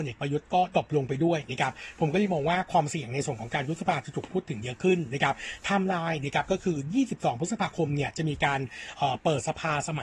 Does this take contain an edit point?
yes; 1 cut; at 8.9 s

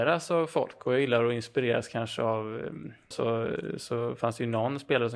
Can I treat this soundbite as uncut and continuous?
no; 1 cut; at 3.1 s

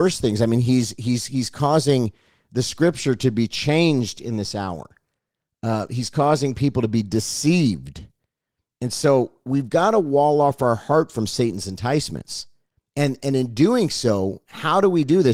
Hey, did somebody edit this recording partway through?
no; 0 cuts

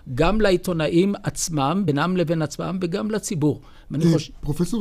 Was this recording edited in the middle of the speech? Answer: no; 0 cuts

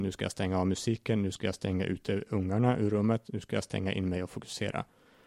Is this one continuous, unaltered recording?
yes; 0 cuts

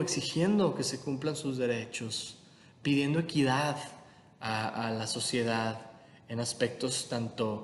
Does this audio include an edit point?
no; 0 cuts

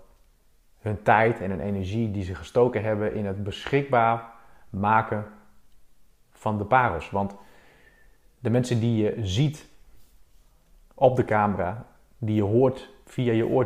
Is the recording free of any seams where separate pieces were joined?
yes; 0 cuts

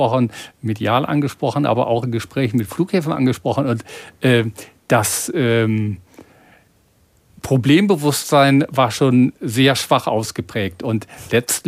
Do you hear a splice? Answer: no; 0 cuts

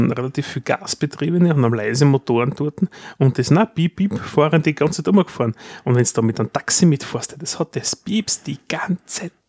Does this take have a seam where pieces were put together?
yes; 1 cut; at 4.0 s

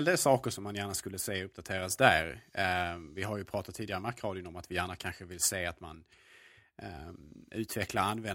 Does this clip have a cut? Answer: no; 0 cuts

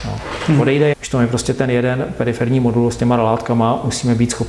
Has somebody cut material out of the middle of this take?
yes; 1 cut; at 0.9 s

